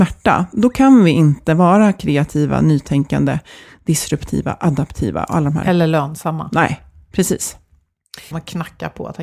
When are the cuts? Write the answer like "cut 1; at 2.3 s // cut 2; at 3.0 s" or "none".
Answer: cut 1; at 8.3 s